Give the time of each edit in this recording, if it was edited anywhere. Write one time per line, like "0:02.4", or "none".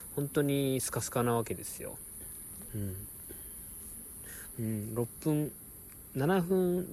0:02.7
0:04.5